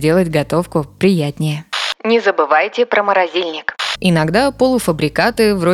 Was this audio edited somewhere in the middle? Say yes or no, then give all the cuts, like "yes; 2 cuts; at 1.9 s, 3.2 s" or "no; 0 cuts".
yes; 1 cut; at 3.9 s